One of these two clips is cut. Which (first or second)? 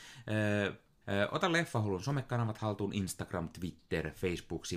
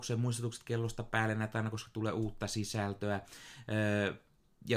first